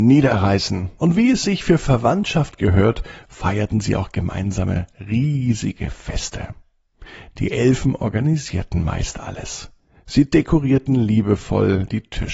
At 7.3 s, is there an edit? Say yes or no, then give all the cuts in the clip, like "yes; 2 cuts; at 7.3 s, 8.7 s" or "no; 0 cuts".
no; 1 cut; at 1.0 s